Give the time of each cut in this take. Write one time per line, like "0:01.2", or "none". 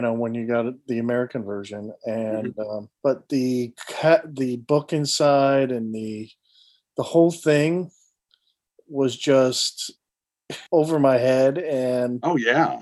0:02.9
0:10.7